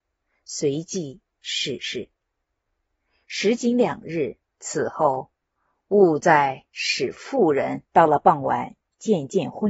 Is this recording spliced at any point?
yes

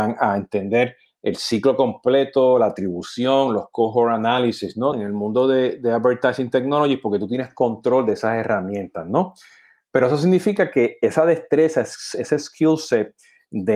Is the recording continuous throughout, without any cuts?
no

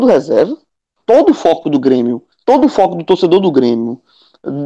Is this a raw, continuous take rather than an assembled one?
no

